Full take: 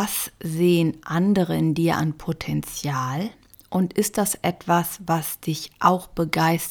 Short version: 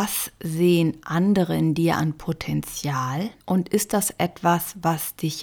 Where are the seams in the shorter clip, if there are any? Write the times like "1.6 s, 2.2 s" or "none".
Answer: 3.4 s

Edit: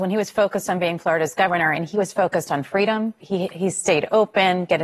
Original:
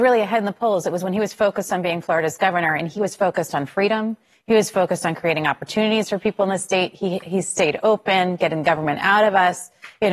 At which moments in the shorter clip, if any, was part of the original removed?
3.2 s

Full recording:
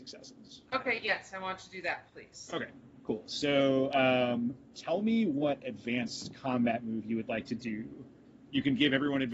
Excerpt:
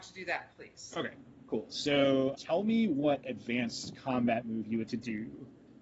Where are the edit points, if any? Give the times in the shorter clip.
2.3 s, 4.9 s

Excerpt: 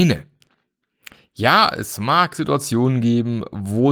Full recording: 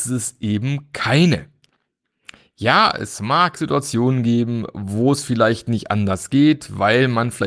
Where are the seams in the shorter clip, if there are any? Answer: none

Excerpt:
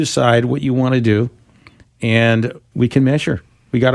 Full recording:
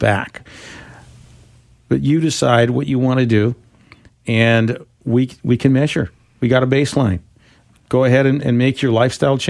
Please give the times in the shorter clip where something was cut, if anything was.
2.7 s

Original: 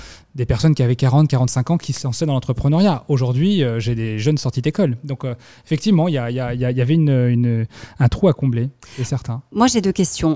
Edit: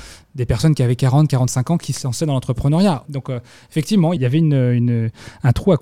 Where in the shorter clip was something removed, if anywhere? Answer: 3.1 s, 4.2 s

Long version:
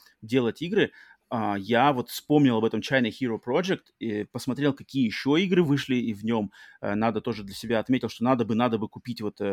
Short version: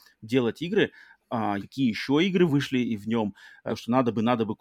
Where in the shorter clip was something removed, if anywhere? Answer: 1.6 s, 3.7 s

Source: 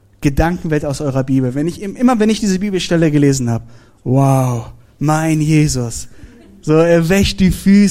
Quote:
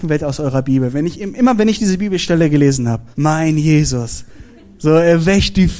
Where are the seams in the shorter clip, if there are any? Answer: 3.1 s

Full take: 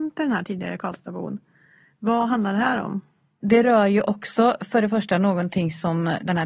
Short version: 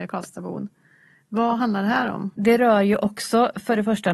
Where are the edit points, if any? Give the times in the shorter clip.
2.3 s

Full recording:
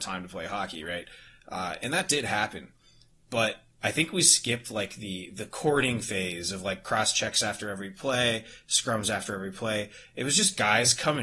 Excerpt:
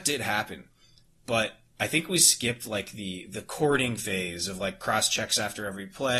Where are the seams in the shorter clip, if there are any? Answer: none

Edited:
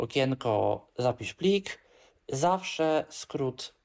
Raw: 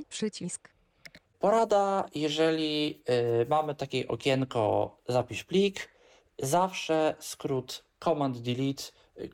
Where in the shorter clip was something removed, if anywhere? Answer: none

